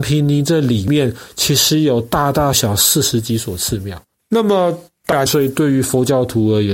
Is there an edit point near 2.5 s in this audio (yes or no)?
yes